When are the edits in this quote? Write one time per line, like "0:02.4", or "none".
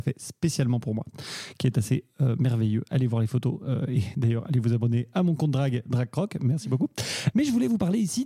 0:07.3